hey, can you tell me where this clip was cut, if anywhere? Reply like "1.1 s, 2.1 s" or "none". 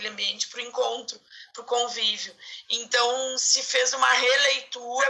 2.6 s